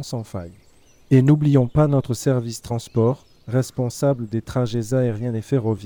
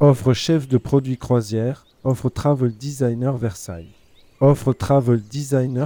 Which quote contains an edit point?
second; 1 cut; at 2.0 s

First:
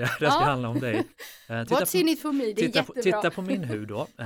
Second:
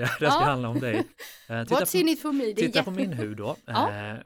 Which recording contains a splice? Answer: second; 1 cut; at 2.8 s

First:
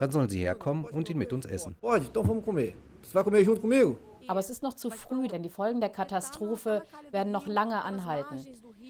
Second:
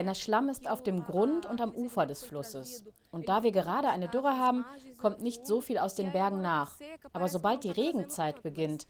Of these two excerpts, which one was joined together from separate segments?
first; 2 cuts; at 4.2 s, 5.3 s

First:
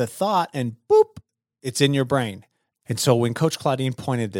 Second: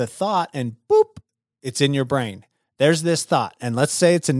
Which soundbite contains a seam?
first; 1 cut; at 2.7 s

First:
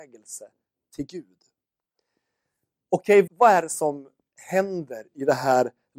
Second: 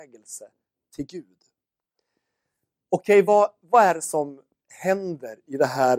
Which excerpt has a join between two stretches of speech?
first; 1 cut; at 3.3 s

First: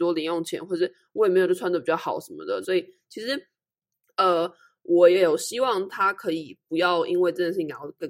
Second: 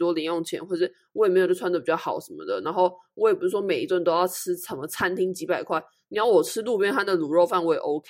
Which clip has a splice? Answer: first; 1 cut; at 2.6 s

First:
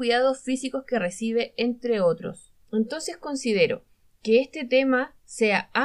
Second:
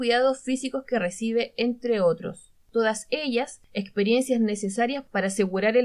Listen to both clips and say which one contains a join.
first; 1 cut; at 2.6 s

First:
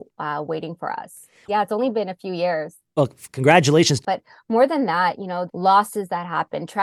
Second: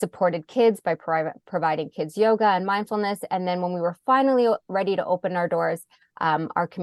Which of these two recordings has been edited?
first; 3 cuts; at 1.5 s, 4.0 s, 5.5 s

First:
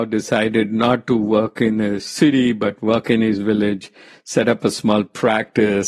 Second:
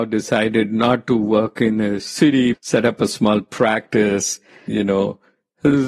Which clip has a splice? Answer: second; 2 cuts; at 2.5 s, 4.7 s

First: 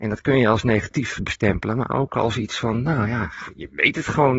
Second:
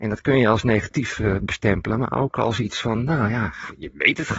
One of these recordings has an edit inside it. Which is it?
first; 1 cut; at 1.2 s

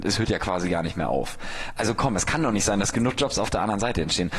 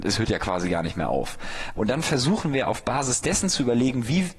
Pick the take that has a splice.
second; 1 cut; at 1.8 s

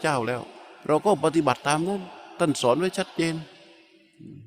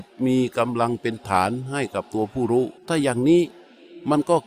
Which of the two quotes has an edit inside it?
second; 1 cut; at 2.8 s

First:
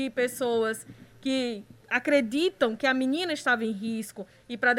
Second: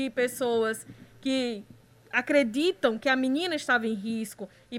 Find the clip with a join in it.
first; 1 cut; at 1.8 s

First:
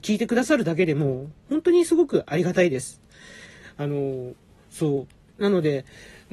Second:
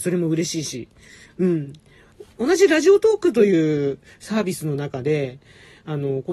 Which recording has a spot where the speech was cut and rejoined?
first; 1 cut; at 5.3 s

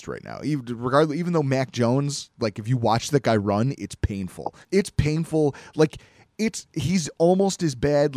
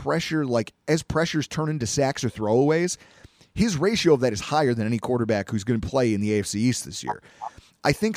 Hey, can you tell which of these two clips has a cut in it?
first; 1 cut; at 4.6 s

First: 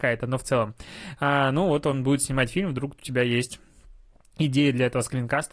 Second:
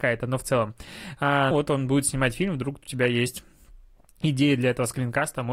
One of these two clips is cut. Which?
second; 1 cut; at 1.5 s

